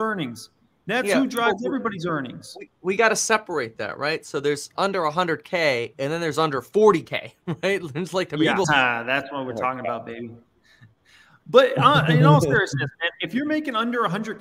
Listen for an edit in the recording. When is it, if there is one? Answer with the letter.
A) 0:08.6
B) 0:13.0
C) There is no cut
A